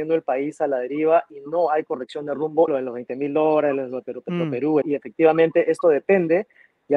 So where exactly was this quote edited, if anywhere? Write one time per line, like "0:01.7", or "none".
0:02.7
0:04.8